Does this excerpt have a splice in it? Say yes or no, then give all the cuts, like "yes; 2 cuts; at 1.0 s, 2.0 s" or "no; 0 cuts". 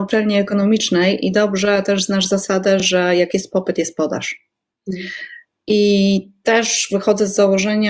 no; 0 cuts